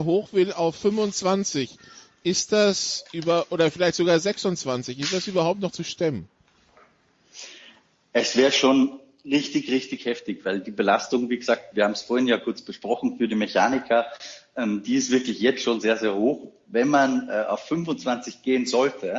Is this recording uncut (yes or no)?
yes